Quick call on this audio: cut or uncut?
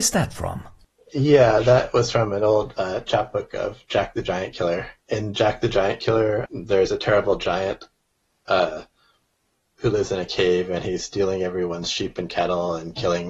cut